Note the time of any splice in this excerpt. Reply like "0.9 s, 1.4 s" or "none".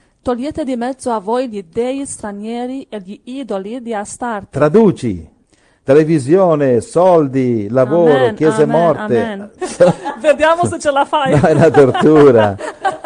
9.6 s